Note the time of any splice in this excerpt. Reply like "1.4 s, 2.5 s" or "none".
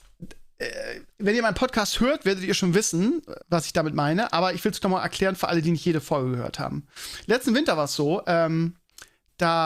3.4 s